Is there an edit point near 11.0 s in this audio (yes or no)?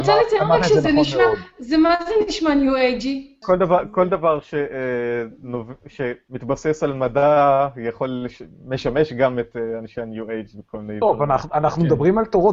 no